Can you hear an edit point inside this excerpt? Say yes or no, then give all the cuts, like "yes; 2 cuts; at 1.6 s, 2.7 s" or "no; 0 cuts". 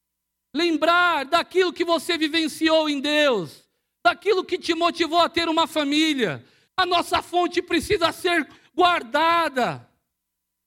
yes; 1 cut; at 6.7 s